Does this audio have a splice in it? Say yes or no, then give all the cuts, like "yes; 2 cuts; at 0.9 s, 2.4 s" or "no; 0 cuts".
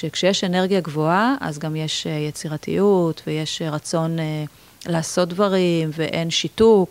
no; 0 cuts